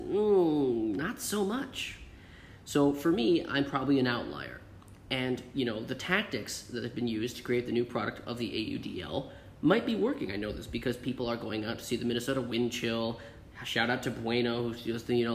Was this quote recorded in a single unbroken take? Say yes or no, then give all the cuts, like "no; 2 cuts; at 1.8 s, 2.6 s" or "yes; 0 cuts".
no; 1 cut; at 10.3 s